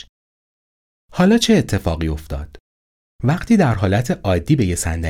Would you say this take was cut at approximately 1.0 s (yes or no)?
yes